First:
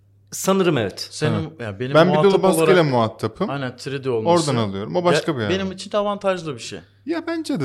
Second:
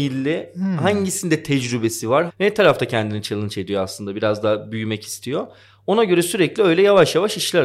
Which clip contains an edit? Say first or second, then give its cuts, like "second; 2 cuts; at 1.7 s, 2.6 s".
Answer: second; 1 cut; at 2.3 s